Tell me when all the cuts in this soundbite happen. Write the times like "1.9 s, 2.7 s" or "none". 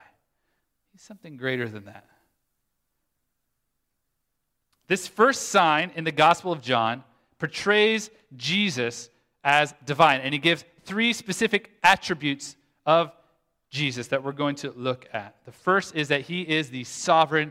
none